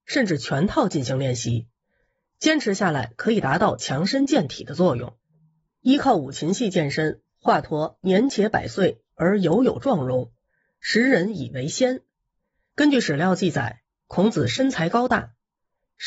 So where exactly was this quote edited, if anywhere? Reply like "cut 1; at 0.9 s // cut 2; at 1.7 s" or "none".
cut 1; at 12.7 s